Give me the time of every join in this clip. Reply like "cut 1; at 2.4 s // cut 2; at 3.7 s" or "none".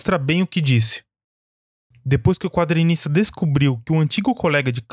cut 1; at 1.9 s